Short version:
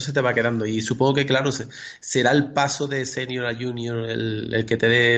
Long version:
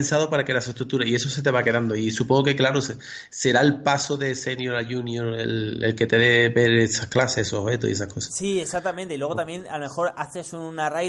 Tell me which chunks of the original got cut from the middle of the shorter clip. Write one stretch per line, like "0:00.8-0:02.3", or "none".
none